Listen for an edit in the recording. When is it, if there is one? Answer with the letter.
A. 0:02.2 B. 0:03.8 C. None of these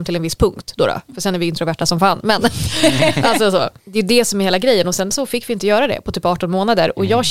B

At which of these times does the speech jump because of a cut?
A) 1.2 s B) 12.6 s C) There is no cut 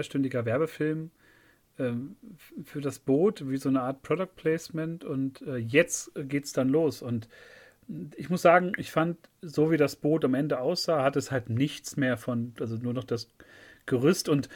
B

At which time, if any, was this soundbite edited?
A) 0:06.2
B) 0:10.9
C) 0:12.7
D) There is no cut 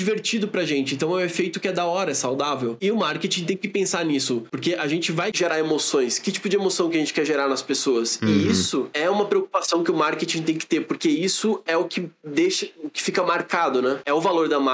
D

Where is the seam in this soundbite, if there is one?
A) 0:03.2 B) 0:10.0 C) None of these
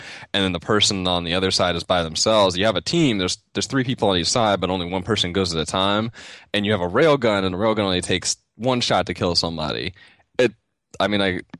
C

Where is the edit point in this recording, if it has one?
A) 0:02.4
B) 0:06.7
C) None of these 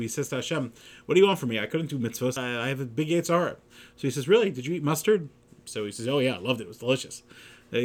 A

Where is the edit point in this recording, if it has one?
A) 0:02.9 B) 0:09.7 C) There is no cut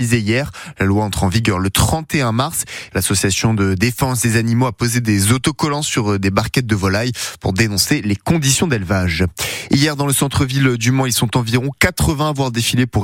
A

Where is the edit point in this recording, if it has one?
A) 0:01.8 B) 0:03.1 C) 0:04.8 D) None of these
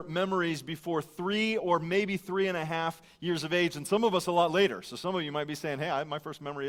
D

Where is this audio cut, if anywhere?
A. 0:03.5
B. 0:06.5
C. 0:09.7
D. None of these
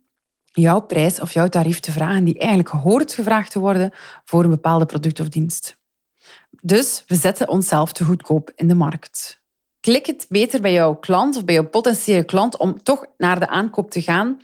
C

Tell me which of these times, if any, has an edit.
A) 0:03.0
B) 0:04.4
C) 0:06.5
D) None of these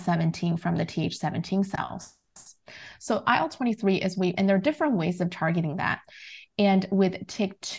B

